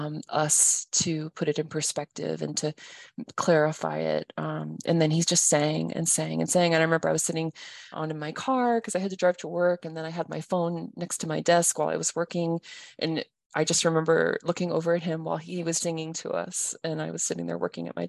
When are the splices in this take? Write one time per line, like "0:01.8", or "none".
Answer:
0:07.9
0:15.8